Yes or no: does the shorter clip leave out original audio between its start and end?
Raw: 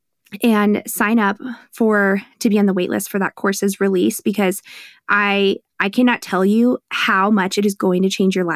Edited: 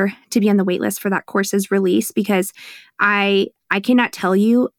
no